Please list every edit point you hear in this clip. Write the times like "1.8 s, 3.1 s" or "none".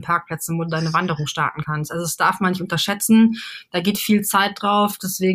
none

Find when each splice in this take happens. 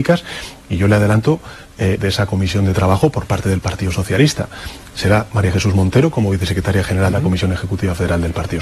2.0 s, 7.1 s

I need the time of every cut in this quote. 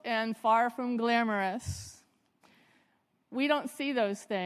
none

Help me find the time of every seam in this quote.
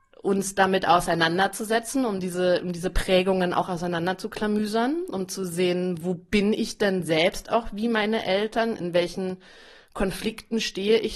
none

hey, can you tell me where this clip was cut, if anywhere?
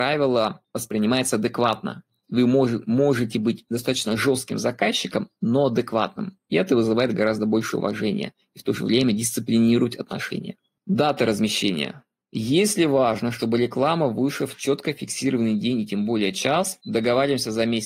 none

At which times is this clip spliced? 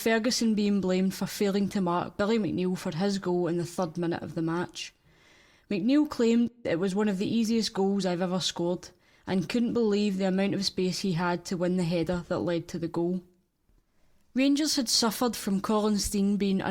none

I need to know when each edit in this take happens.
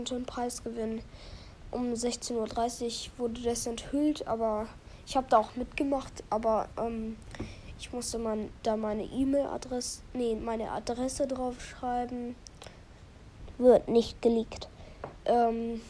10.4 s

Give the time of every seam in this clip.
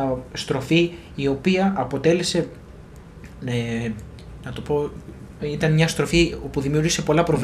5.4 s

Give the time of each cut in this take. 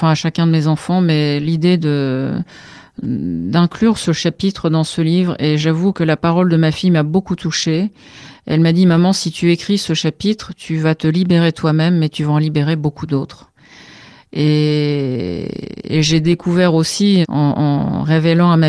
17.2 s

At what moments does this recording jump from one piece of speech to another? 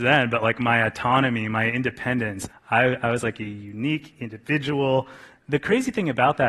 2.5 s, 5.4 s

